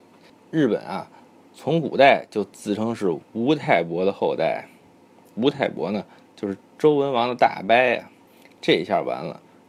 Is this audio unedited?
yes; 0 cuts

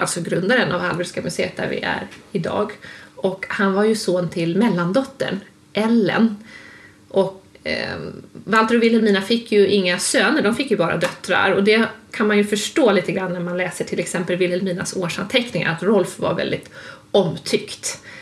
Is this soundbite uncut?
no; 1 cut; at 7.5 s

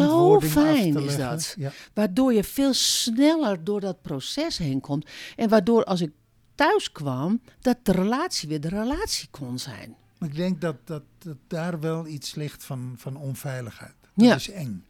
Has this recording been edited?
no; 0 cuts

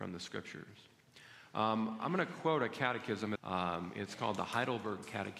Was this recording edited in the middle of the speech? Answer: yes; 1 cut; at 3.4 s

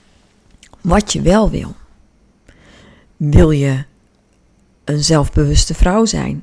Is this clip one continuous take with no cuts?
yes; 0 cuts

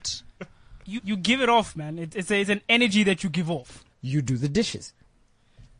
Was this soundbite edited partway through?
yes; 2 cuts; at 1.0 s, 3.9 s

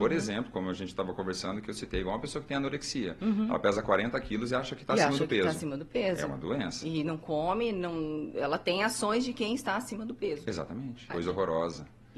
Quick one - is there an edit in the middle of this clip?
yes; 1 cut; at 11.1 s

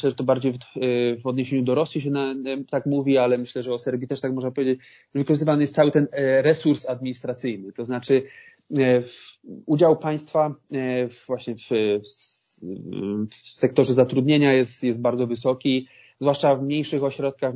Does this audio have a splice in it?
no; 0 cuts

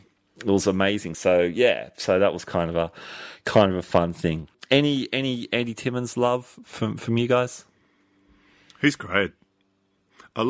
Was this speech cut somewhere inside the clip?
no; 0 cuts

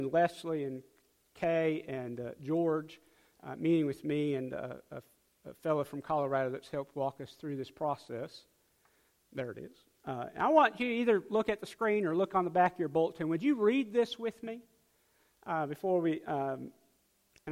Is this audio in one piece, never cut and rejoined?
yes; 0 cuts

